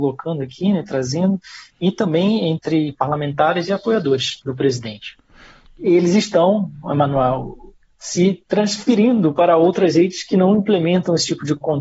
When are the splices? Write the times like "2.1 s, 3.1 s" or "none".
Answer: 5.7 s